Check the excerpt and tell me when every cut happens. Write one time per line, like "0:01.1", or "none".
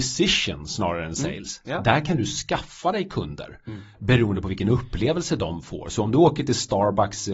none